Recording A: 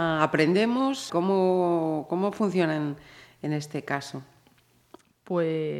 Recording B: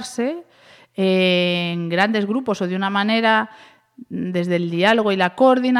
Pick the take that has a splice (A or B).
A